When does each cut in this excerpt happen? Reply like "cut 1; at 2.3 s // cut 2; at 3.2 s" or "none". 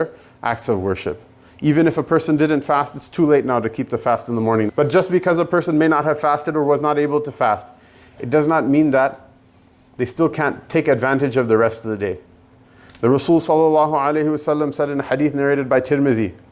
cut 1; at 4.7 s